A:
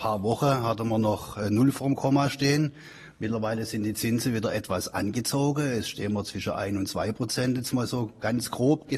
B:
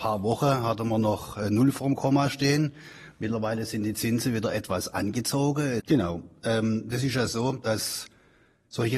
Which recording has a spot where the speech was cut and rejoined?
B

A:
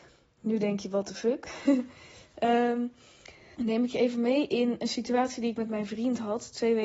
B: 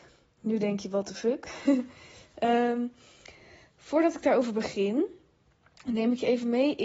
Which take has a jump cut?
A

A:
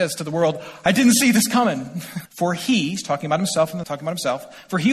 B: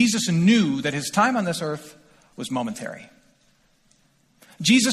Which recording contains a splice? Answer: A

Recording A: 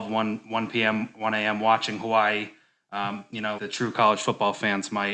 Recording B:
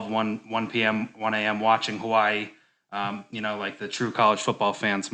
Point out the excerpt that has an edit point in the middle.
A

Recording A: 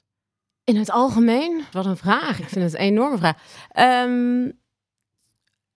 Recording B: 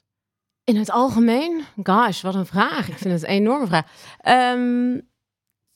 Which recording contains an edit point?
A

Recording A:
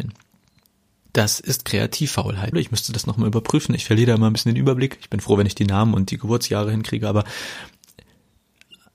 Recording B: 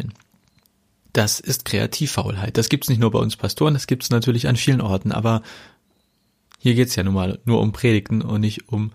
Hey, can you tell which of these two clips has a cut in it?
A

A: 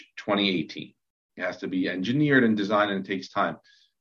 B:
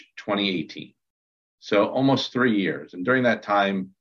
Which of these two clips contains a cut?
A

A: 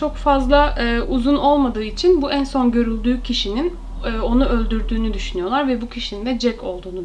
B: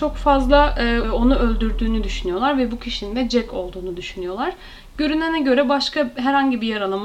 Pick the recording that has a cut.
B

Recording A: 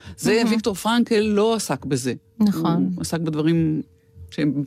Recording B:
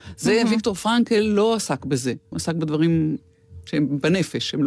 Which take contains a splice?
B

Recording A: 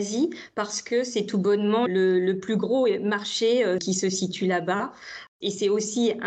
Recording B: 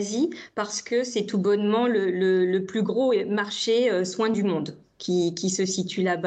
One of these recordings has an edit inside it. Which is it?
A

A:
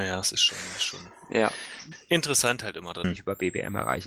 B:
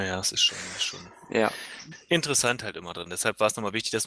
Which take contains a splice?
A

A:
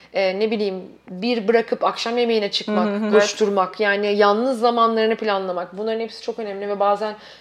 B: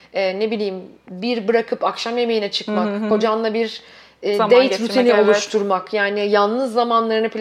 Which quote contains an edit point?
A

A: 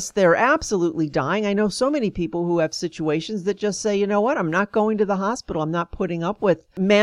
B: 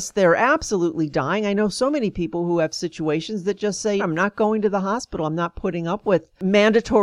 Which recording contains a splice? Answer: B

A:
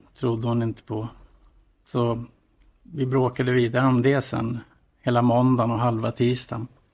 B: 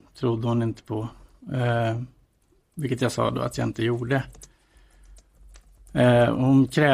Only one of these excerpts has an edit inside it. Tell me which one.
B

